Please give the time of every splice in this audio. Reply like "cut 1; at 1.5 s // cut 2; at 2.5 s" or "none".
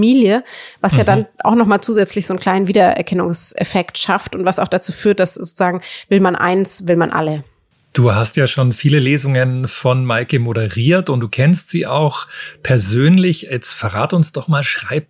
none